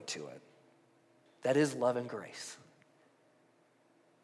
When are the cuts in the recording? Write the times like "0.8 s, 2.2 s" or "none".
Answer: 1.3 s

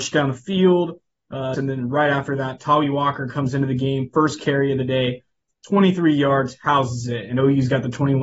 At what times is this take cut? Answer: 1.5 s

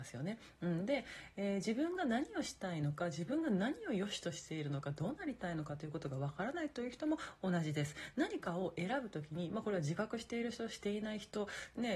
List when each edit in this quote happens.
none

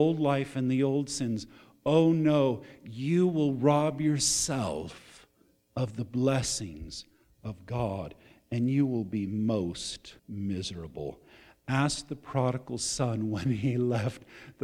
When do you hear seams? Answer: 10.2 s

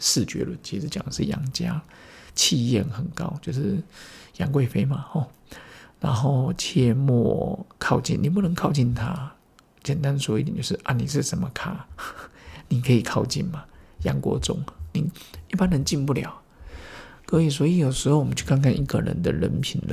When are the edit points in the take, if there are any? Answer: none

